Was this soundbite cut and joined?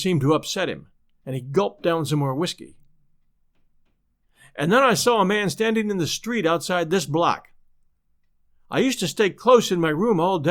no; 0 cuts

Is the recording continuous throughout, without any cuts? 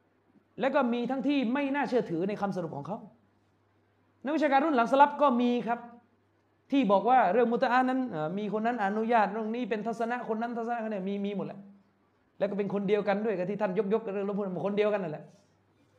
yes; 0 cuts

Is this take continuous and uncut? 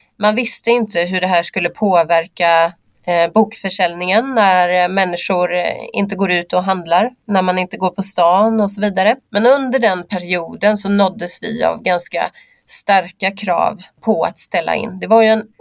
no; 1 cut; at 9.2 s

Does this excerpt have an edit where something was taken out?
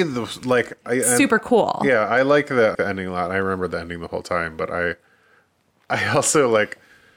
yes; 1 cut; at 2.7 s

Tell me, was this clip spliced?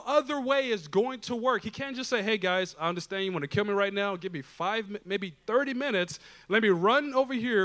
no; 0 cuts

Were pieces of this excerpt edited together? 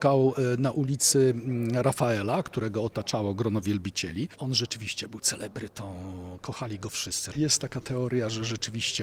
yes; 1 cut; at 7.3 s

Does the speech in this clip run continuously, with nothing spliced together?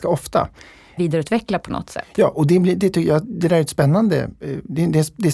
no; 1 cut; at 1.0 s

